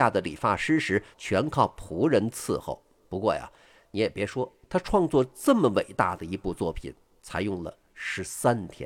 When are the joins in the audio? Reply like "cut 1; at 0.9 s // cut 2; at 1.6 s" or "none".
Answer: cut 1; at 1.1 s // cut 2; at 4.6 s